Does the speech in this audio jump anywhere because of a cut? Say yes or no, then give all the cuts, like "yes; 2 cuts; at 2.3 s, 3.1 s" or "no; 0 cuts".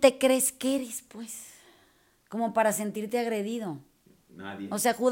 no; 0 cuts